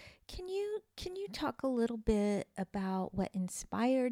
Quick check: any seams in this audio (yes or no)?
no